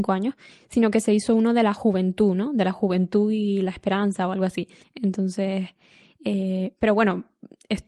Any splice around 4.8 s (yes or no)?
yes